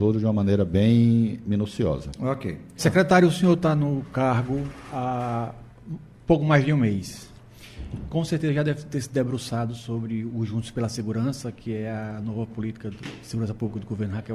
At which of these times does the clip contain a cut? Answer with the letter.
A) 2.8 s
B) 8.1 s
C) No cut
A